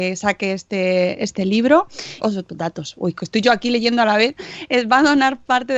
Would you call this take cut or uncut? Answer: cut